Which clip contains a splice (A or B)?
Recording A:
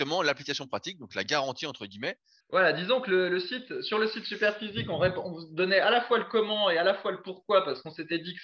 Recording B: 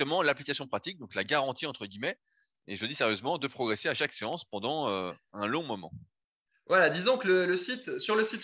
A